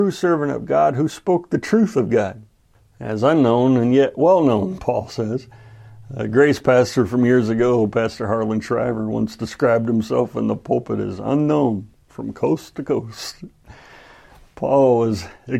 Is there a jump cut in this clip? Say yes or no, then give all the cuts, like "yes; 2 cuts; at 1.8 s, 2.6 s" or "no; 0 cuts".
no; 0 cuts